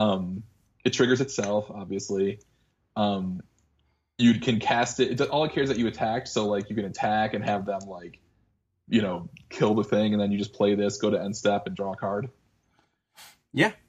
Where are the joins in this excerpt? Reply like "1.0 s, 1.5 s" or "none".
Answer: none